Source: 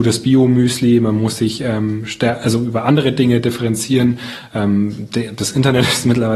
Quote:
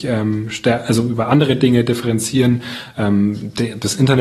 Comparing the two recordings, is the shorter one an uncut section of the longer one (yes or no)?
yes